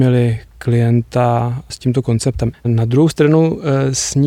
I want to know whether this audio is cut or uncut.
cut